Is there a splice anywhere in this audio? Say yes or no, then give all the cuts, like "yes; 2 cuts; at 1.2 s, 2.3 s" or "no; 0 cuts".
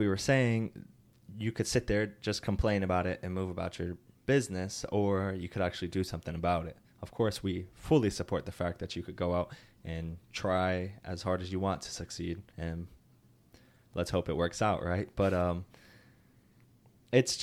yes; 1 cut; at 12.5 s